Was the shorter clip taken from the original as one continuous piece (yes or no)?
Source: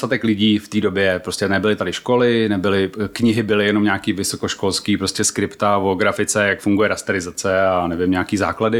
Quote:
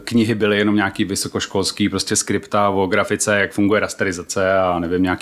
yes